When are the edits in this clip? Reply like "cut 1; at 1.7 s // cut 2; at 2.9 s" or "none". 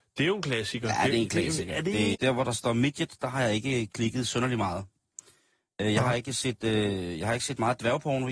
cut 1; at 2.1 s

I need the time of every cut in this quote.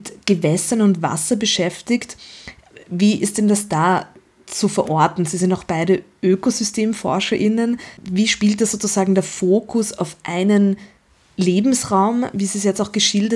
none

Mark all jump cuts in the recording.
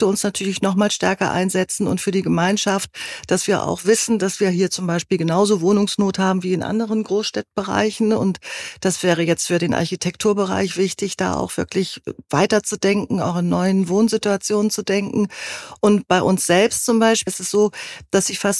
cut 1; at 17.3 s

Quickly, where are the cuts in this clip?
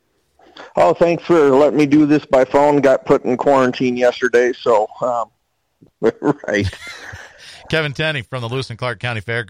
cut 1; at 5.9 s

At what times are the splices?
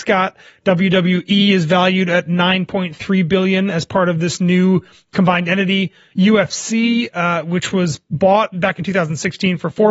cut 1; at 8.5 s

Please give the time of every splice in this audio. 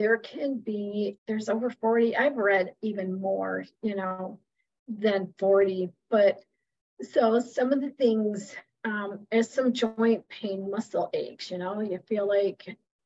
cut 1; at 1.2 s

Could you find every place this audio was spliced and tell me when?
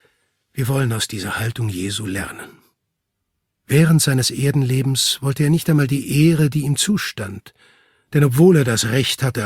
none

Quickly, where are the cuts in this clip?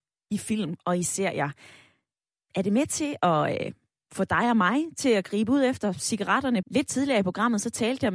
cut 1; at 6.6 s

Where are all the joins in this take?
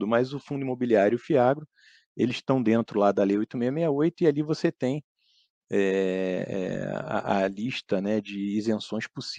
none

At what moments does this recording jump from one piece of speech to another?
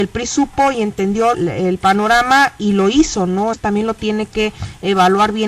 cut 1; at 1.3 s // cut 2; at 3.5 s

